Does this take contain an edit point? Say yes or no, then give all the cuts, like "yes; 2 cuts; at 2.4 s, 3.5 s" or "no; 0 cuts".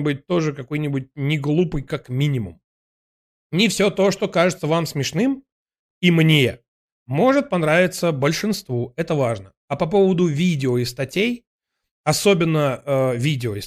no; 0 cuts